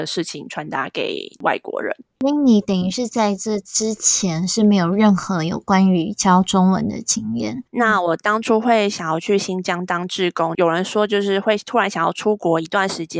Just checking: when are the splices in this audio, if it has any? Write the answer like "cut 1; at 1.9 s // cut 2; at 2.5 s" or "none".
cut 1; at 7.7 s